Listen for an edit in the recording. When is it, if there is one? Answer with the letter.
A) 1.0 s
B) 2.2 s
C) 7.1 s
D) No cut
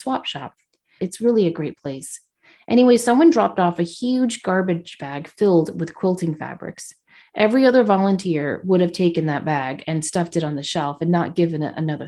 A